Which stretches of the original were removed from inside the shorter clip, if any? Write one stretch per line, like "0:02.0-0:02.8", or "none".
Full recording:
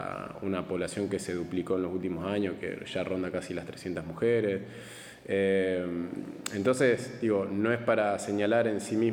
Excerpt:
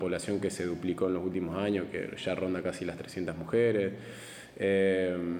none